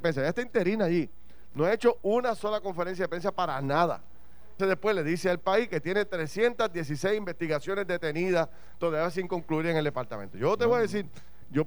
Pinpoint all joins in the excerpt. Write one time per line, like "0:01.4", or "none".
0:04.6

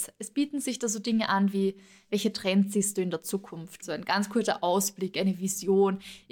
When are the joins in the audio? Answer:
0:03.8

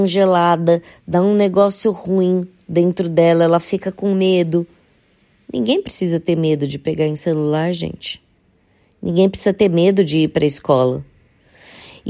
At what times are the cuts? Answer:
none

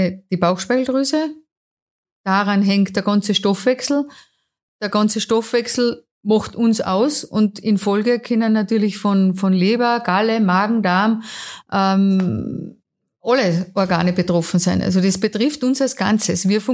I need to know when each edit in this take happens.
none

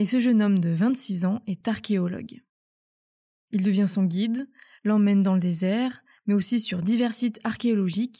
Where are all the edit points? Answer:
none

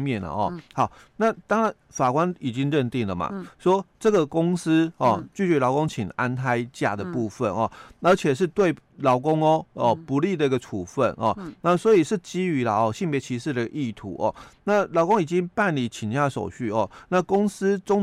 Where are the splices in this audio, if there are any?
none

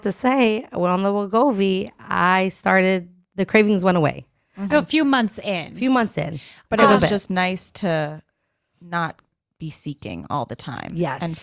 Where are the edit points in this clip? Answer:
0:04.7

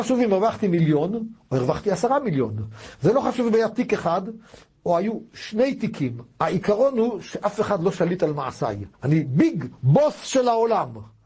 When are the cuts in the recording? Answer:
0:08.9

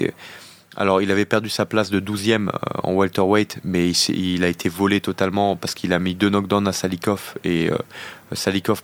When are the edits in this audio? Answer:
none

